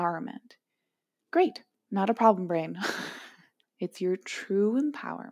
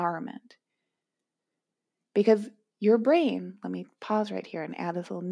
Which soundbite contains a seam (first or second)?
first